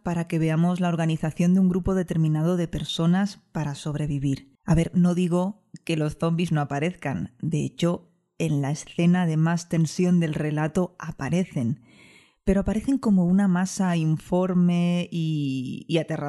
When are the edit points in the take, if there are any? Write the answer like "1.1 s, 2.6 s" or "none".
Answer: 4.6 s